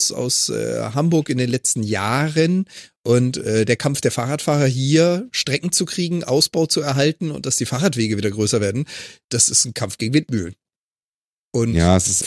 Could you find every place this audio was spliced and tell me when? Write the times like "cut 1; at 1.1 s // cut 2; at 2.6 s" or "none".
none